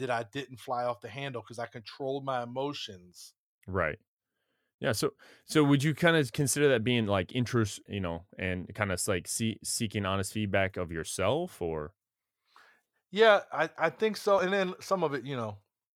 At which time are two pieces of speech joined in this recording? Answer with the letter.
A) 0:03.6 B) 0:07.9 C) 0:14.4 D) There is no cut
B